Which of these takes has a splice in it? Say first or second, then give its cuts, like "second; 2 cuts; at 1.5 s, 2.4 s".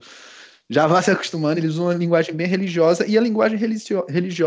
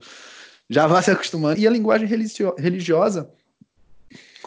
second; 1 cut; at 1.5 s